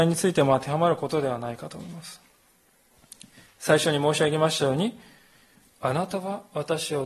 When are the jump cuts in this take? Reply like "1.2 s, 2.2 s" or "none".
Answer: none